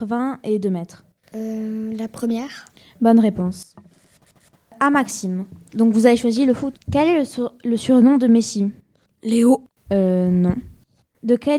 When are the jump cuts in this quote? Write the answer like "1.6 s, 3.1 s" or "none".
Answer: none